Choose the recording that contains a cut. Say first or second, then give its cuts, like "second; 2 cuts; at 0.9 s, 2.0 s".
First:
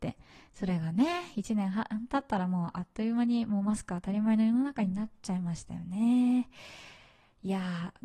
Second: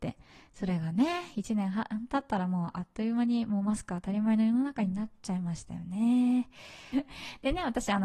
second; 1 cut; at 6.9 s